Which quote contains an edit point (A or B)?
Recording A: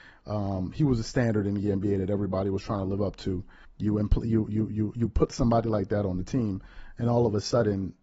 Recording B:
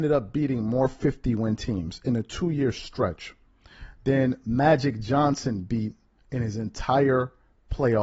A